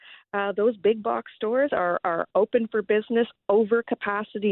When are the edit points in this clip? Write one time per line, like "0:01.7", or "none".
none